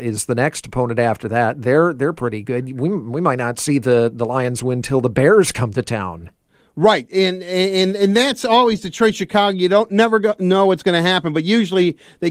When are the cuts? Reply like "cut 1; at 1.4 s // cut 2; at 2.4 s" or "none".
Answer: none